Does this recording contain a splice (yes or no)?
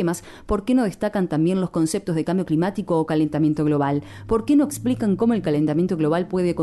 no